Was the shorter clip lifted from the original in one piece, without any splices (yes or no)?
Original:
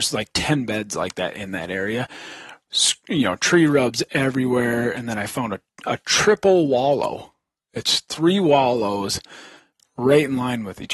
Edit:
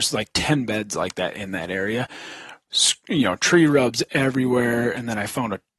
yes